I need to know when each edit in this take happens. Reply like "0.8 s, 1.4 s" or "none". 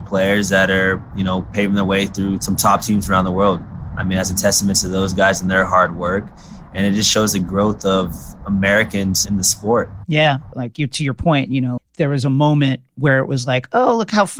10.5 s, 11.8 s